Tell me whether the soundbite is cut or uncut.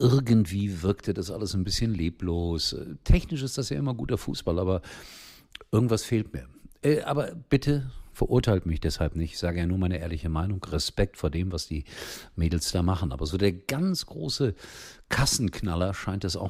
uncut